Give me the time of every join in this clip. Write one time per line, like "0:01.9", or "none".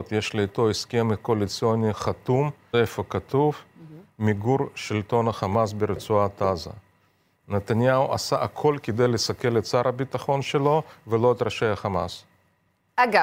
0:02.7